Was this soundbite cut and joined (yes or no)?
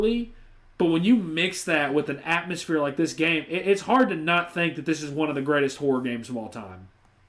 no